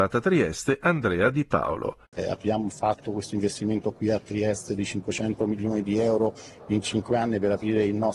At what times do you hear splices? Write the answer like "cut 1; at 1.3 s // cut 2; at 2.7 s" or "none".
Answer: cut 1; at 2.1 s